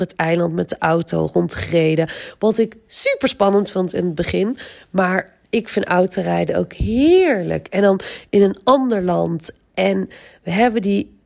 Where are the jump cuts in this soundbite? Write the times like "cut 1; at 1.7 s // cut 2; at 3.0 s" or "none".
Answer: cut 1; at 5.4 s